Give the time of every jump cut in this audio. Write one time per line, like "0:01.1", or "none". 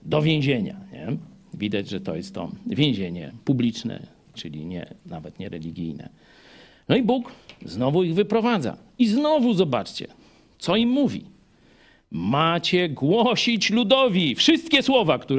none